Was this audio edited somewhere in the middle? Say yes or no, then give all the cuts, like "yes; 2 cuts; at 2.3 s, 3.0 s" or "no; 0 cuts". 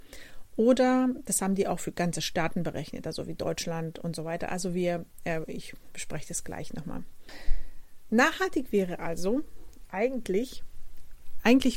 no; 0 cuts